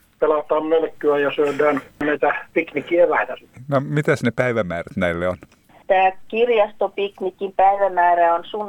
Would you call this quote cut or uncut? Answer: uncut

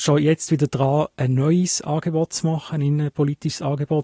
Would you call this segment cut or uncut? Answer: uncut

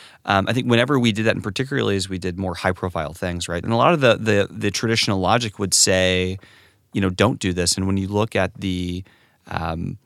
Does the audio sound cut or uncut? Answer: cut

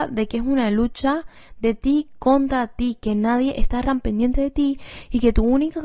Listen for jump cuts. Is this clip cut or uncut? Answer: cut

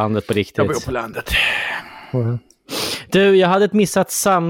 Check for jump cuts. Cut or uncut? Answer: uncut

